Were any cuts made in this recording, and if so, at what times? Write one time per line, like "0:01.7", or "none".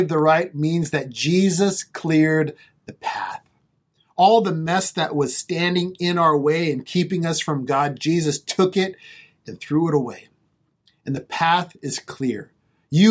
none